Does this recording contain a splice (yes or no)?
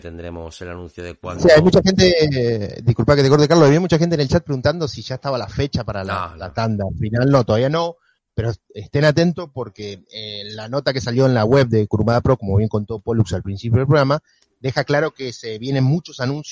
no